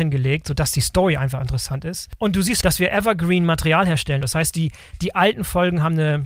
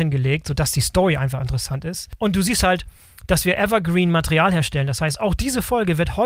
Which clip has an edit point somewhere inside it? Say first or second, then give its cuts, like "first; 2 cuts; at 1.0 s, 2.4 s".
first; 2 cuts; at 2.6 s, 4.2 s